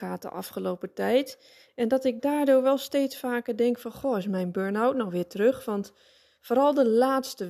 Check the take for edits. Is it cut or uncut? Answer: uncut